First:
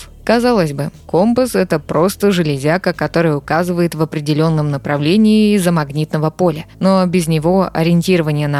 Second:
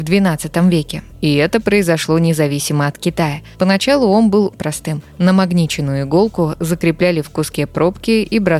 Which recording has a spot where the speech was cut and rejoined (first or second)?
second